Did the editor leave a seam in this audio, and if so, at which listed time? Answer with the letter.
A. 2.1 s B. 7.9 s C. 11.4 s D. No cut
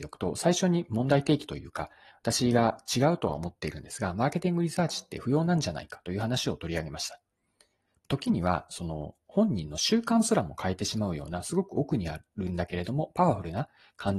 B